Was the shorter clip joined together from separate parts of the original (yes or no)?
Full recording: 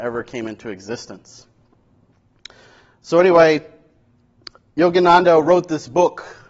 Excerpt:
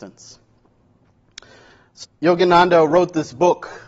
yes